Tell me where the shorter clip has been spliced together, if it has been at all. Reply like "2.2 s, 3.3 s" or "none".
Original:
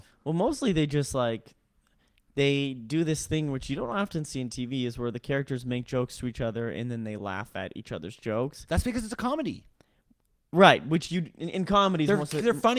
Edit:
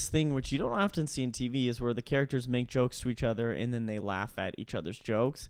none